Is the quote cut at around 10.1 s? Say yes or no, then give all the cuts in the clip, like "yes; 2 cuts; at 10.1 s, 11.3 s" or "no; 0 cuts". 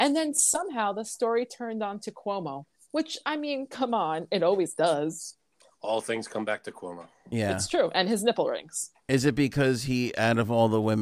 no; 0 cuts